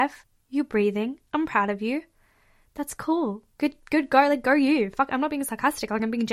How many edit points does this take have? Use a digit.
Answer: 0